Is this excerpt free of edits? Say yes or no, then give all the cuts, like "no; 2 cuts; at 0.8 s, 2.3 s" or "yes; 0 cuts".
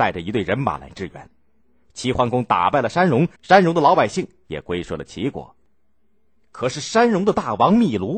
no; 1 cut; at 3.4 s